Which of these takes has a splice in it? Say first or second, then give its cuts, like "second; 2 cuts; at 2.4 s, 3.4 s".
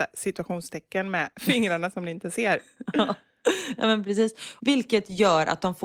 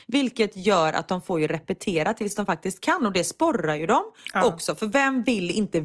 first; 1 cut; at 4.6 s